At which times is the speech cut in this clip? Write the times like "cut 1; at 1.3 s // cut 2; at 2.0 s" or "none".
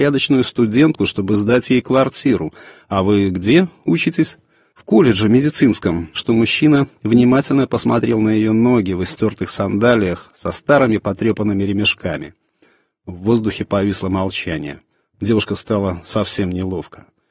cut 1; at 6.1 s